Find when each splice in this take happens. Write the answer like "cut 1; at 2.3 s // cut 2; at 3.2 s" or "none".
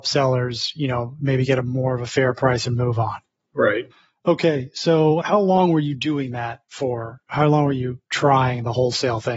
none